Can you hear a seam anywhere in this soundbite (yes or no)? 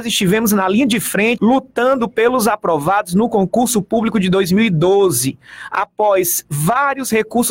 yes